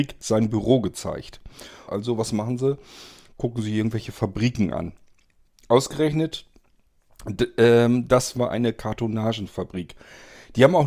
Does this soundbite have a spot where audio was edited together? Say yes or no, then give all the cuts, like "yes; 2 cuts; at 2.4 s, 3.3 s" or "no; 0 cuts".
yes; 2 cuts; at 1.9 s, 8.3 s